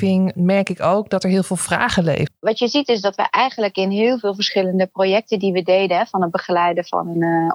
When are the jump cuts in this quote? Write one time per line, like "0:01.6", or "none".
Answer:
0:02.3